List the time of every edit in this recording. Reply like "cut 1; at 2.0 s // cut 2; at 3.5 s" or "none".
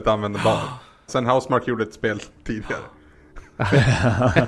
cut 1; at 1.1 s